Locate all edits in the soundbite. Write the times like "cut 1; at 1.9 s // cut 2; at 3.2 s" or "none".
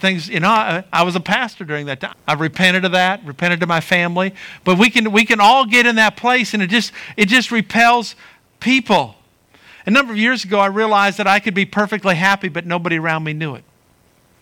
cut 1; at 2.1 s